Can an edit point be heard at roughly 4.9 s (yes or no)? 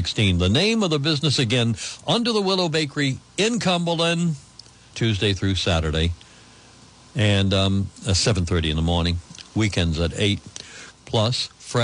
yes